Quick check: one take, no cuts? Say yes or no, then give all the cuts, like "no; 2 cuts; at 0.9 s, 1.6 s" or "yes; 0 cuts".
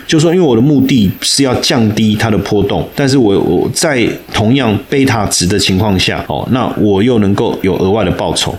yes; 0 cuts